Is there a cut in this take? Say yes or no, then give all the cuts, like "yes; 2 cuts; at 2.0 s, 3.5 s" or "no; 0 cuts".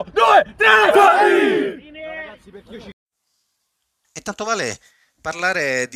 yes; 1 cut; at 4.0 s